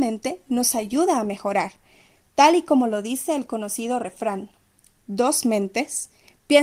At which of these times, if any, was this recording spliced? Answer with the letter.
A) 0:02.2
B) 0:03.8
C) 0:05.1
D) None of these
D